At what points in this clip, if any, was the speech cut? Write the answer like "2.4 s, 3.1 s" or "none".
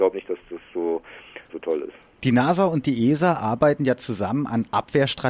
1.5 s